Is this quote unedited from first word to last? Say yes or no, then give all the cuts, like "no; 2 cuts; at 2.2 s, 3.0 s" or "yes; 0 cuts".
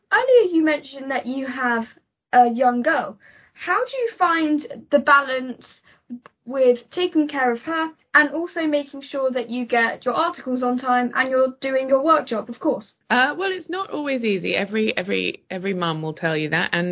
no; 1 cut; at 13.0 s